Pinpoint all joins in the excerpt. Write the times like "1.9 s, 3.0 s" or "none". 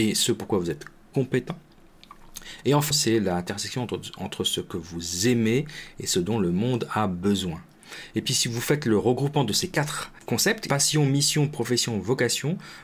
2.9 s